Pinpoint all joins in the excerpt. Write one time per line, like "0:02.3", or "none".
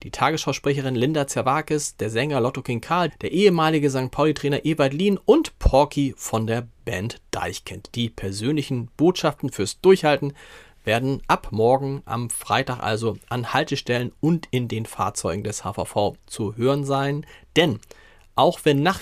0:03.1